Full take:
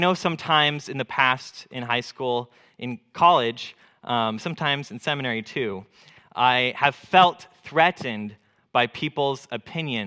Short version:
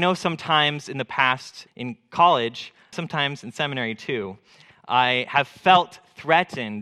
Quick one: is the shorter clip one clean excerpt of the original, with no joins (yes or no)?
no